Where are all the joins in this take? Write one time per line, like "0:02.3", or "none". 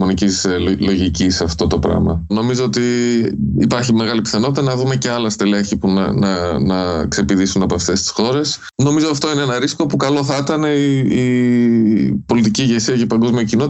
0:02.3